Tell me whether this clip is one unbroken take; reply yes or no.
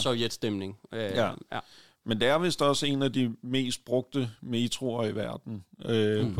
yes